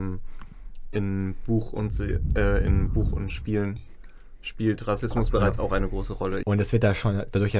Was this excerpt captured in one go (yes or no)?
no